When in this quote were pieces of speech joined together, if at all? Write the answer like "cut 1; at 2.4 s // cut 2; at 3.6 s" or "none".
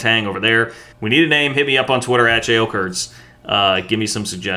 cut 1; at 0.9 s